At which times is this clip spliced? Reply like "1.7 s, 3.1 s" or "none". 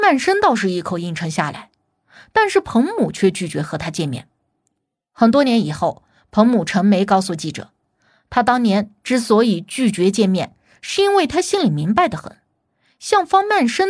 none